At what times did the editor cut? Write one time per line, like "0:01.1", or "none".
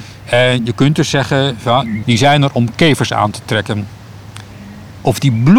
0:02.0